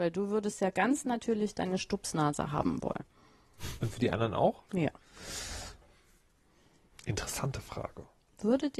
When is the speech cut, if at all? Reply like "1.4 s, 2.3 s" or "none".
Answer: 4.7 s